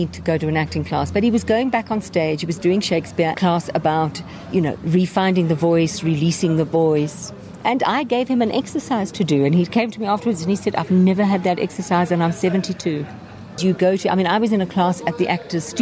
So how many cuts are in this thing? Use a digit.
2